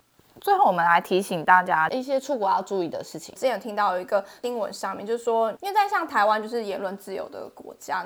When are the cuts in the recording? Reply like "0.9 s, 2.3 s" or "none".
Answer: 3.4 s